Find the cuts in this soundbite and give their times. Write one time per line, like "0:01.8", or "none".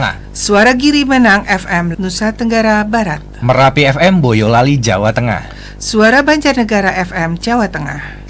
0:01.9